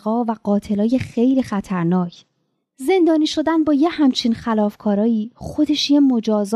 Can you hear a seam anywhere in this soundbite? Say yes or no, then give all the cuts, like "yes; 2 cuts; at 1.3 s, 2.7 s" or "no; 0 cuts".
no; 0 cuts